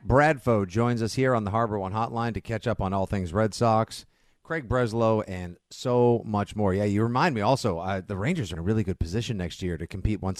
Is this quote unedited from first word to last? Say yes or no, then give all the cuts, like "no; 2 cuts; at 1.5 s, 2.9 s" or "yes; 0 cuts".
no; 1 cut; at 8.5 s